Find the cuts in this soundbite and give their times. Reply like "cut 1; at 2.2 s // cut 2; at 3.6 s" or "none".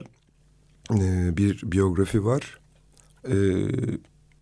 cut 1; at 3.2 s